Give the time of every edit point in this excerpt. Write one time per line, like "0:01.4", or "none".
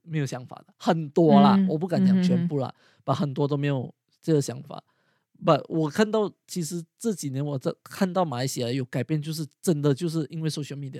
none